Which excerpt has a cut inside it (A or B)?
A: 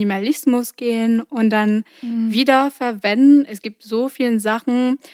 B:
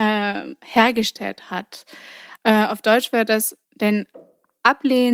B